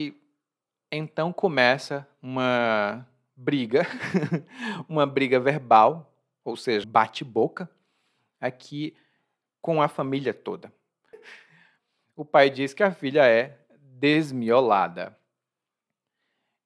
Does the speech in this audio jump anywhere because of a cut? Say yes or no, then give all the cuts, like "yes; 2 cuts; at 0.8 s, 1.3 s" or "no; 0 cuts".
yes; 2 cuts; at 6.8 s, 11.1 s